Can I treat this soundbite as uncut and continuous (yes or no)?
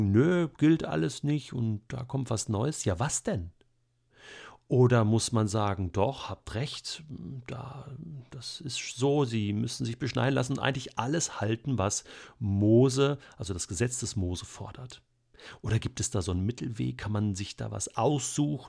yes